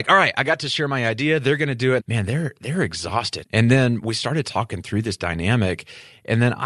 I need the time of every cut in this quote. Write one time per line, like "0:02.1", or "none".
0:02.0
0:03.4